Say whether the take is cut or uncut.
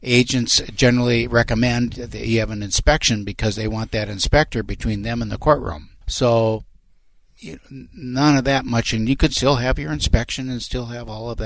cut